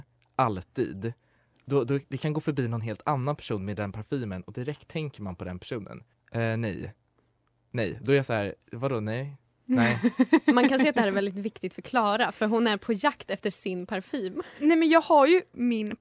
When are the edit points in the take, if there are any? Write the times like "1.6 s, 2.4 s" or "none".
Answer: 6.1 s